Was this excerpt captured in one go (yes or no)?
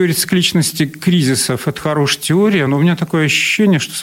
yes